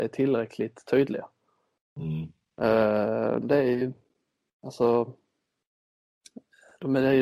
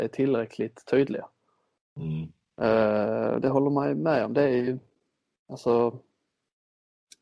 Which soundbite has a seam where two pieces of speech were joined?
first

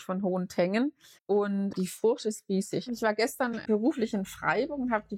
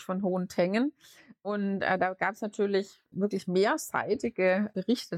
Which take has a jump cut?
first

